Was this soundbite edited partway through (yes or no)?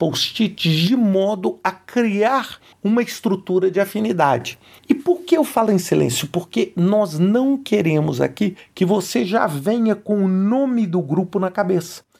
no